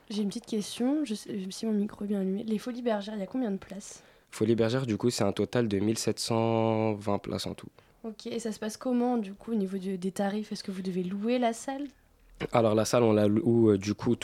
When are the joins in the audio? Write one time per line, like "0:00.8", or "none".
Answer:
none